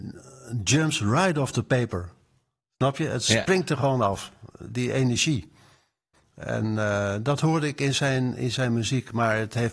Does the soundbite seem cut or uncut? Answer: uncut